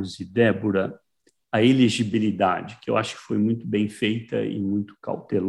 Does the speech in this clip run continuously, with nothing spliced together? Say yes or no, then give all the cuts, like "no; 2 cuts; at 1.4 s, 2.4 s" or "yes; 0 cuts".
yes; 0 cuts